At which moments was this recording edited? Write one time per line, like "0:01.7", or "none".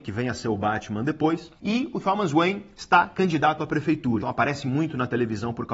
0:01.6
0:04.2